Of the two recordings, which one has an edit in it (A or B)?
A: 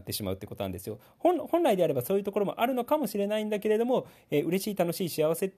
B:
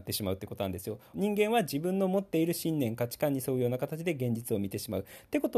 B